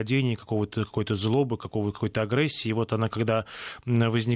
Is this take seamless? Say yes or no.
yes